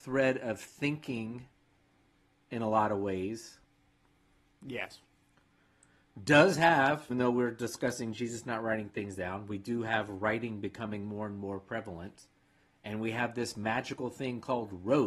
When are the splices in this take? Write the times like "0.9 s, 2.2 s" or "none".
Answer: 7.1 s